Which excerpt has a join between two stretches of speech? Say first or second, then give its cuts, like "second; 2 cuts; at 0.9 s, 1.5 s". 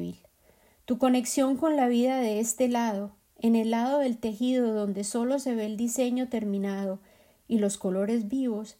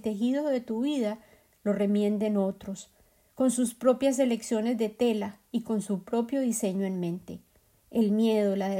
second; 1 cut; at 7.8 s